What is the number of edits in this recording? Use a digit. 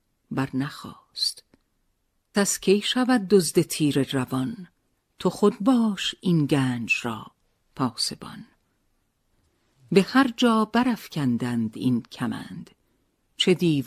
1